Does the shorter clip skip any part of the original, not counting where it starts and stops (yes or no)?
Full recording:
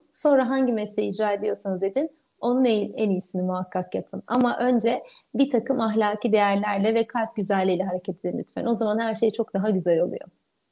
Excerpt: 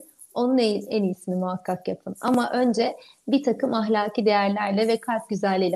no